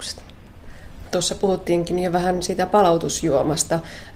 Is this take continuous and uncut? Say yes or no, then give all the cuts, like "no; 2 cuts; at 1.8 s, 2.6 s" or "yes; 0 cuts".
no; 1 cut; at 1.1 s